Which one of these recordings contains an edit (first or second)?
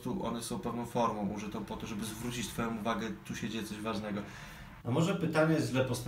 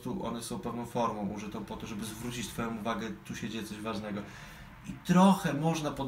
first